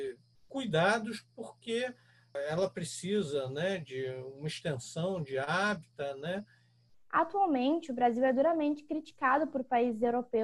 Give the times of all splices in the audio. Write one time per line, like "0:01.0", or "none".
0:06.9